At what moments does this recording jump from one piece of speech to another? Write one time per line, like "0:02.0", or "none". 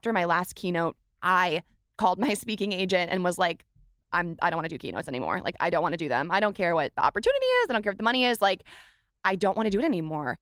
none